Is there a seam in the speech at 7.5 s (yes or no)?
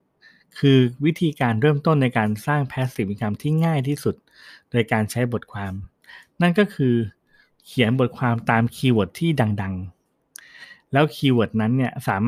no